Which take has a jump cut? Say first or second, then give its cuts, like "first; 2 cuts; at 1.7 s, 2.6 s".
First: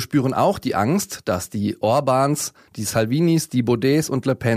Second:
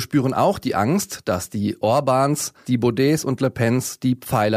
second; 1 cut; at 2.6 s